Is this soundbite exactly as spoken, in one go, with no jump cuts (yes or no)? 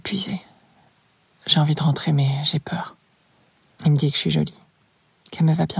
no